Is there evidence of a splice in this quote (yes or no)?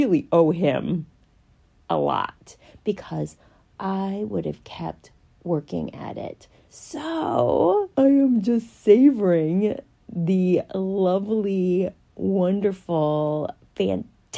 yes